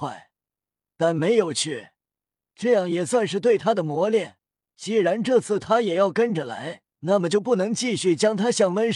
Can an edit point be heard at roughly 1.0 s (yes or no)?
no